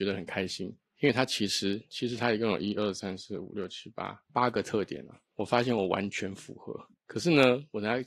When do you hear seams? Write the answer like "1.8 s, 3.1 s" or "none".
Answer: 4.3 s